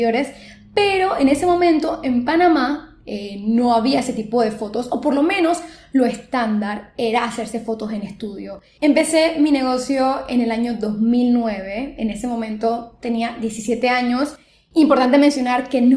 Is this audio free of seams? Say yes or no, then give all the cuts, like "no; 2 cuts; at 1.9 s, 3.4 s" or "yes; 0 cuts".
no; 1 cut; at 8.8 s